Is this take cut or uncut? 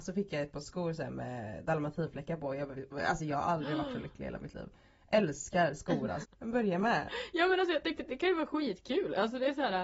cut